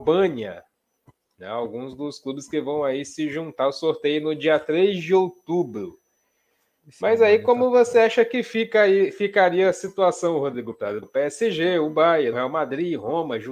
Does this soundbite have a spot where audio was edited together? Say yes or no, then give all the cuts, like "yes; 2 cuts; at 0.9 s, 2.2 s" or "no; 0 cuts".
yes; 2 cuts; at 11.0 s, 12.3 s